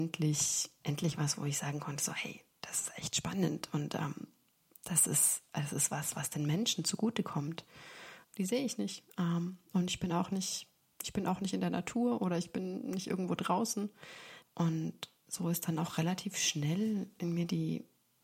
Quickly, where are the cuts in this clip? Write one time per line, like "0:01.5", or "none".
0:08.2
0:14.4